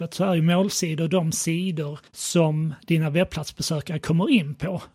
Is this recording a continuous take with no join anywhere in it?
no; 1 cut; at 2.1 s

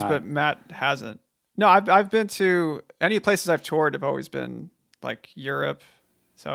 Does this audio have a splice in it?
no; 0 cuts

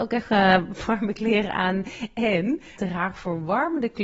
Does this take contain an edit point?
yes; 1 cut; at 2.8 s

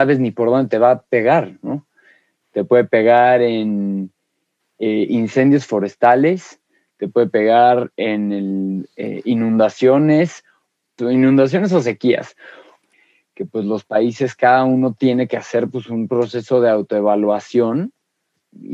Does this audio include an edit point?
no; 0 cuts

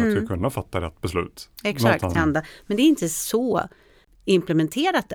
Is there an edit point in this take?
yes; 1 cut; at 2.2 s

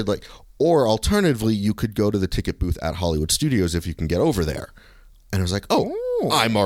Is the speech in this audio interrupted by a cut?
no; 0 cuts

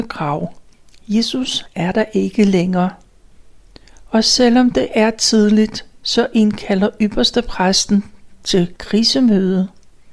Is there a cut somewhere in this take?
no; 0 cuts

